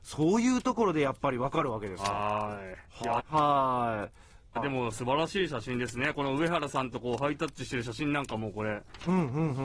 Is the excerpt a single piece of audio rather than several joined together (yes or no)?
no